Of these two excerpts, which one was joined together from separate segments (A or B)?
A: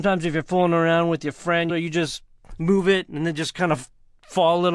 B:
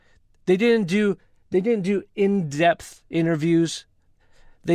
A